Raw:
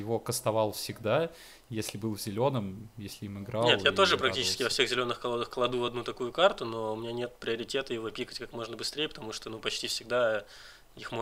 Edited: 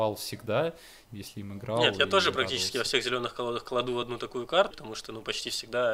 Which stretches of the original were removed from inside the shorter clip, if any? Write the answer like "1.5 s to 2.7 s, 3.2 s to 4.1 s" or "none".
1.6 s to 2.9 s, 6.6 s to 9.1 s